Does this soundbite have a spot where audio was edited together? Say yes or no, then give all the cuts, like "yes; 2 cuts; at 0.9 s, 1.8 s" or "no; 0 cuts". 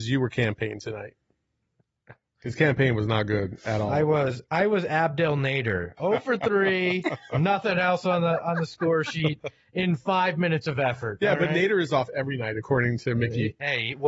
yes; 1 cut; at 6.0 s